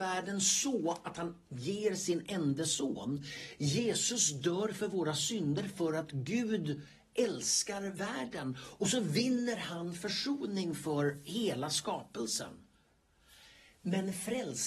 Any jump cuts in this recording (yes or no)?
no